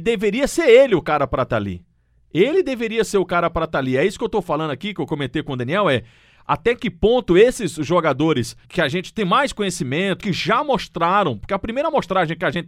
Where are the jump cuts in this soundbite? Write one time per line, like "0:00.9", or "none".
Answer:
0:08.6
0:10.2